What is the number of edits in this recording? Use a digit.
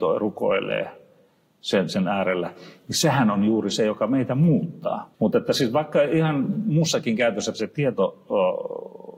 2